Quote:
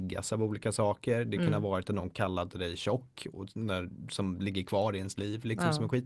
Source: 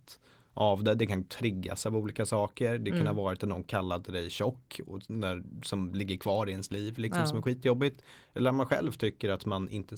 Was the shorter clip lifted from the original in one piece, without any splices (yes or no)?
yes